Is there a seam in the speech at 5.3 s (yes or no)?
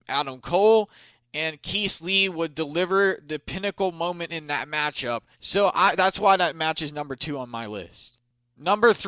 yes